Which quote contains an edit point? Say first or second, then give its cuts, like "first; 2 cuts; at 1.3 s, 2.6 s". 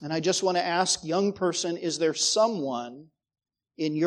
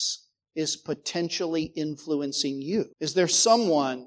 second; 1 cut; at 2.9 s